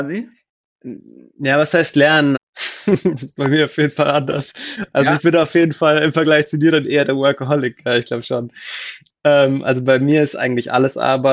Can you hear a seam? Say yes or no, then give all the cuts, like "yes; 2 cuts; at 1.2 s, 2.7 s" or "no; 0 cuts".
yes; 1 cut; at 2.3 s